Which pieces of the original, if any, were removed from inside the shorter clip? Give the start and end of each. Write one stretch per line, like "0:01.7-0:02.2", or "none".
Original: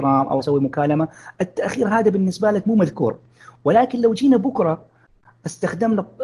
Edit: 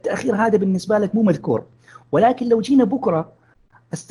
none